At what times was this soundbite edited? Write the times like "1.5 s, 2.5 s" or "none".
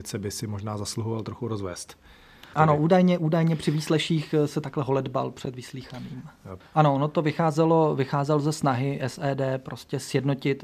2.5 s, 6.6 s